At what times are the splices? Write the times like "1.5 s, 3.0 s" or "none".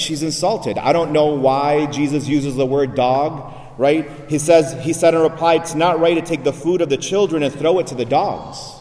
none